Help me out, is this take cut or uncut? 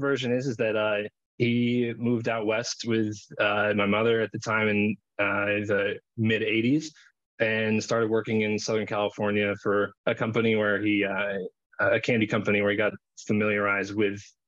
uncut